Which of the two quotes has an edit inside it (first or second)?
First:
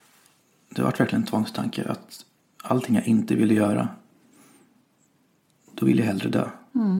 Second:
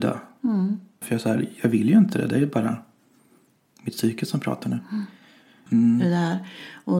second